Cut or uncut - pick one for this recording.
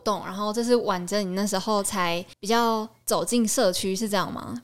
cut